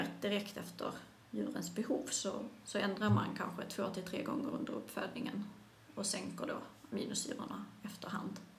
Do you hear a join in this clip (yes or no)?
no